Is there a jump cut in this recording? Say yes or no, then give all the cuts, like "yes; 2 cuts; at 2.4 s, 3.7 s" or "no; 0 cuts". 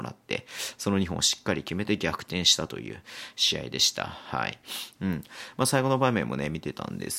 yes; 1 cut; at 5.0 s